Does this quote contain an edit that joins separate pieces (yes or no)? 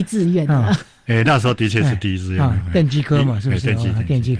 no